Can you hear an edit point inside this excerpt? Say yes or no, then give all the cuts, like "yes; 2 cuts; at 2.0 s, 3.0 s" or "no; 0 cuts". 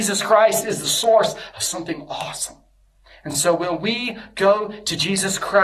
no; 0 cuts